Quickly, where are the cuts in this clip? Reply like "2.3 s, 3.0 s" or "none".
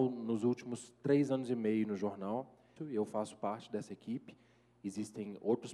2.8 s